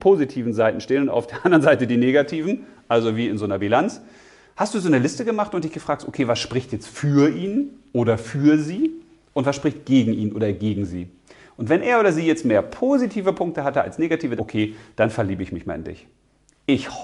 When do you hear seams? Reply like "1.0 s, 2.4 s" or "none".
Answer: 14.4 s